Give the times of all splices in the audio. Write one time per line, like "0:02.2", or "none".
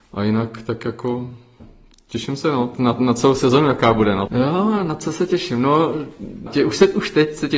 0:02.8
0:04.3
0:06.5